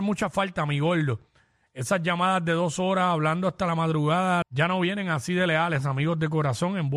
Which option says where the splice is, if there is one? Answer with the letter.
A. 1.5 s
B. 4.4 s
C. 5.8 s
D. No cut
B